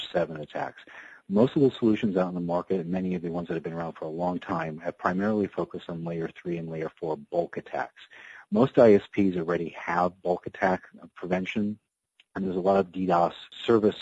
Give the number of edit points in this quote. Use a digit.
0